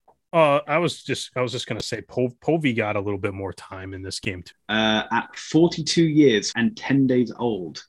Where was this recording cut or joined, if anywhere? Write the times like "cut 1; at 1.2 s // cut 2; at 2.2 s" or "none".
cut 1; at 4.5 s // cut 2; at 6.5 s

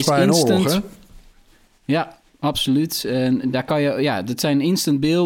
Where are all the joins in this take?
none

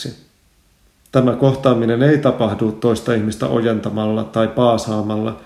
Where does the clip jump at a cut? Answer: cut 1; at 1.0 s

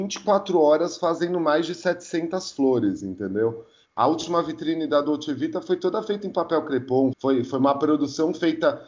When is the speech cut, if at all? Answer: cut 1; at 3.9 s // cut 2; at 7.1 s

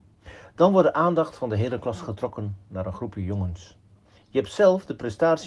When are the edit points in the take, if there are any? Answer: cut 1; at 4.2 s

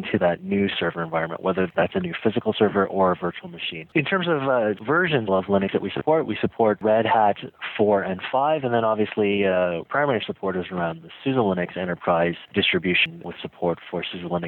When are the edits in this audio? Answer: cut 1; at 3.9 s // cut 2; at 5.3 s

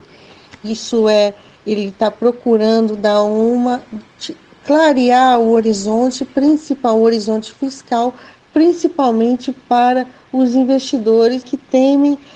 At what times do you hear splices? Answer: cut 1; at 11.4 s

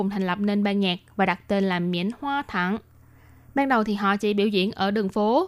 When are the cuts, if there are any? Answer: none

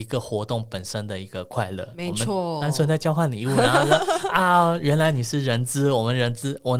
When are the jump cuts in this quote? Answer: none

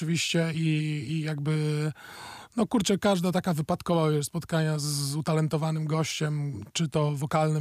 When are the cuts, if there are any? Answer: cut 1; at 6.7 s

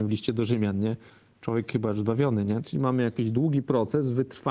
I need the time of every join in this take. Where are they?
cut 1; at 2.6 s

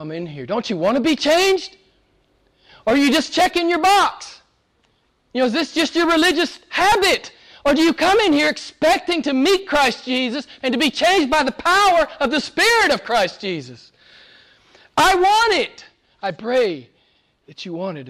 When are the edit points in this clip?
cut 1; at 10.6 s

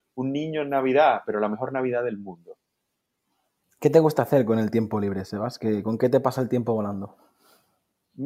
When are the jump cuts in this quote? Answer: cut 1; at 3.6 s

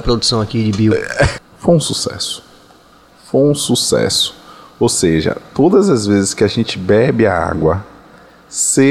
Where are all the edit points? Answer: cut 1; at 1.4 s

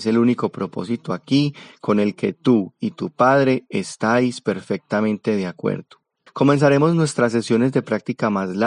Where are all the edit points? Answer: cut 1; at 6.3 s

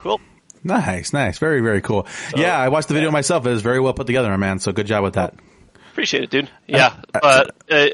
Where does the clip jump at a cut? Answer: none

